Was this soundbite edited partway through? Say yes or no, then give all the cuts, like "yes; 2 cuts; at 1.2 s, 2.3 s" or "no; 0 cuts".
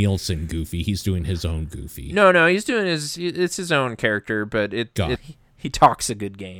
yes; 1 cut; at 5.2 s